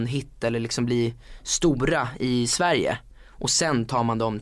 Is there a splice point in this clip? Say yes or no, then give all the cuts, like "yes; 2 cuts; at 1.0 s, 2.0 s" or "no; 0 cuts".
no; 0 cuts